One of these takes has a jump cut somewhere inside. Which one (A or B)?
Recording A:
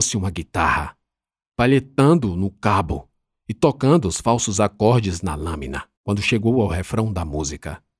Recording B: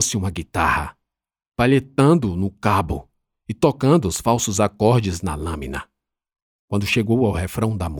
A